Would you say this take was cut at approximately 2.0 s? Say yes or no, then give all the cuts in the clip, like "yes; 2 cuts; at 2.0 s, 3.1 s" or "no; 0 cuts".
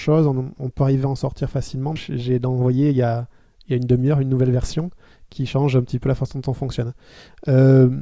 yes; 1 cut; at 2.0 s